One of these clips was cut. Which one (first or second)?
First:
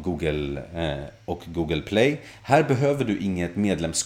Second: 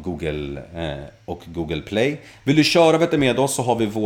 second